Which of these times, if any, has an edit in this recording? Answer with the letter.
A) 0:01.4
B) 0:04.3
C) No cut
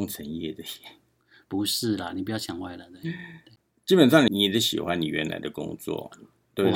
B